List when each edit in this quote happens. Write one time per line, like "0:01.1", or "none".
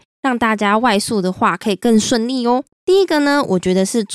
0:02.7